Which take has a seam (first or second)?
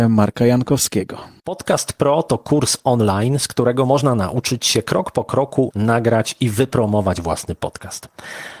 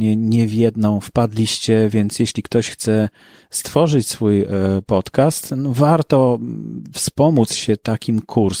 first